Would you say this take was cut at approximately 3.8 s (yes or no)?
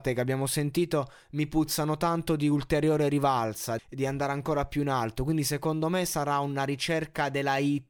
yes